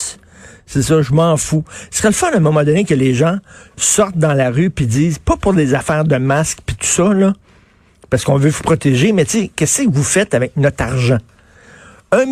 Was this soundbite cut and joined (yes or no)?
no